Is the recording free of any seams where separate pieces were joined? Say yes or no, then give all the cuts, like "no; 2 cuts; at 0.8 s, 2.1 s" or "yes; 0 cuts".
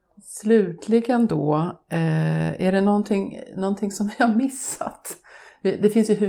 yes; 0 cuts